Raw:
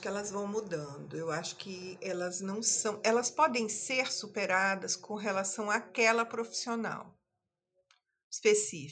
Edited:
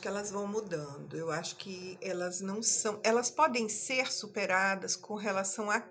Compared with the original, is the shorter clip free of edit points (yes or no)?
yes